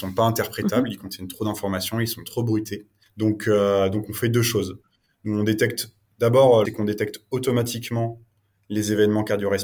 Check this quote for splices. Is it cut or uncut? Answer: cut